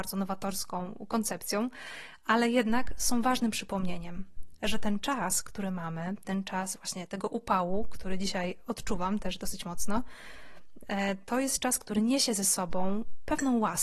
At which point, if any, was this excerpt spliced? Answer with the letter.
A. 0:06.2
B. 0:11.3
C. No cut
C